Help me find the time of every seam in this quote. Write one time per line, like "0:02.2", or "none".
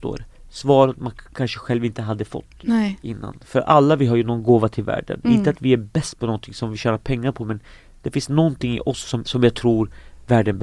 0:09.2